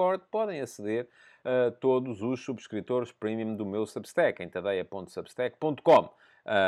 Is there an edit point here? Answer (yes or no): no